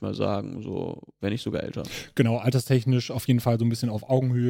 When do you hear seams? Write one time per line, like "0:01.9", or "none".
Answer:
none